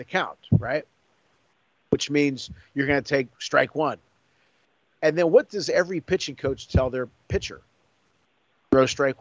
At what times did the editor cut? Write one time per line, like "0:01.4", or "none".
none